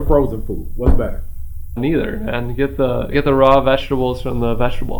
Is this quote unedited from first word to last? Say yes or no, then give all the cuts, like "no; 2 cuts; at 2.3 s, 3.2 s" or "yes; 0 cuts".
no; 2 cuts; at 1.8 s, 3.1 s